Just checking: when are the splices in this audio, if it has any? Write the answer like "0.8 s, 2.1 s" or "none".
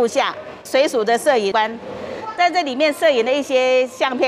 none